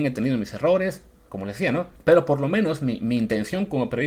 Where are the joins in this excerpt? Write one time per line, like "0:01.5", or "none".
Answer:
0:02.0